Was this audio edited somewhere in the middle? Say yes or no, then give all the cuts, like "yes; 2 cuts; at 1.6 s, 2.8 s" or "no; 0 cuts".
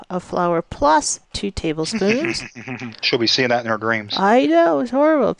yes; 1 cut; at 1.2 s